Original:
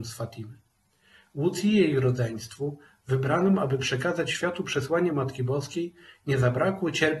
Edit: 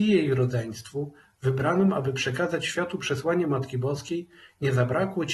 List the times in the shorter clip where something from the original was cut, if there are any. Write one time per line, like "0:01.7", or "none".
none